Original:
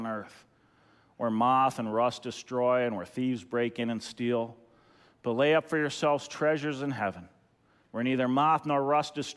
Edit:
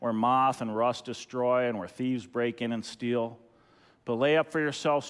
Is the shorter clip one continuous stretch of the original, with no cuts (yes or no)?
yes